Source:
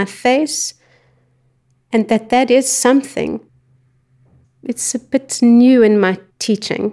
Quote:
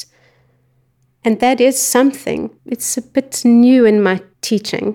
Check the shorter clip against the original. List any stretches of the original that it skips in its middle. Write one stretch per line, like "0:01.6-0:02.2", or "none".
0:02.1-0:02.3
0:03.5-0:04.5